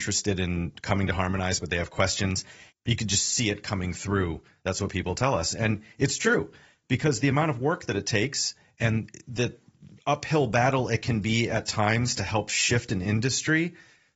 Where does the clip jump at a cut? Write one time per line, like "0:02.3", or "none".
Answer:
0:02.7